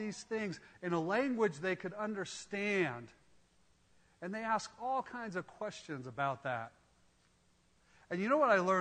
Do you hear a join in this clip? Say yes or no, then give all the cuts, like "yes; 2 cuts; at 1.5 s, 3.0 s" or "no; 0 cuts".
no; 0 cuts